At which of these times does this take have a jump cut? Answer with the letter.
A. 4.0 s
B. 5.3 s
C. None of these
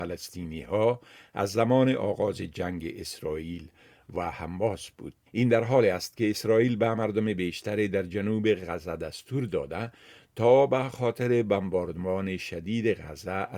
B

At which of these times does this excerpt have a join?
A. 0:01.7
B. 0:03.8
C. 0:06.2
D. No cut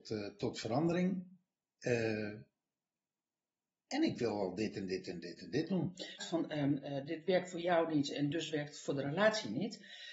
C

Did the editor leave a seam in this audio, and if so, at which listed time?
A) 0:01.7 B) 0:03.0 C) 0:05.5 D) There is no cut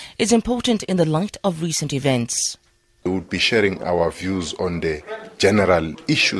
B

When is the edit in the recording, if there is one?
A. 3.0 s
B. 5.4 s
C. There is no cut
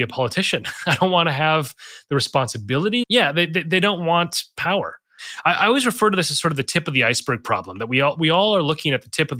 A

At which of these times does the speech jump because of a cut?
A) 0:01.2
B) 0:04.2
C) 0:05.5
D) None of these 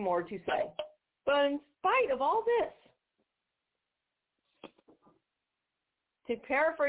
A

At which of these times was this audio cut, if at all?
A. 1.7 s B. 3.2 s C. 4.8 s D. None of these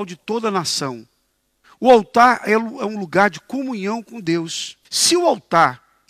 C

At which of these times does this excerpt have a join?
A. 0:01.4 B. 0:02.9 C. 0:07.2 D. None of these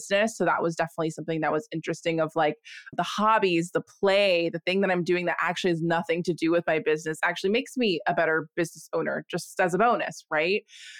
B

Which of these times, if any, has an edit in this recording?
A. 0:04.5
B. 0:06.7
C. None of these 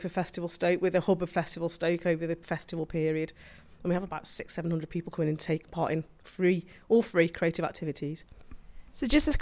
C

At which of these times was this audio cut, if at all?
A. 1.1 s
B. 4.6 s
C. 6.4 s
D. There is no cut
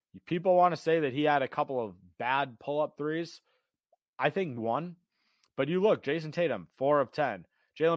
B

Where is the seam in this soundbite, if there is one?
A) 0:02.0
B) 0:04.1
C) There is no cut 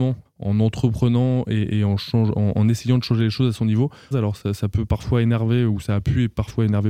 B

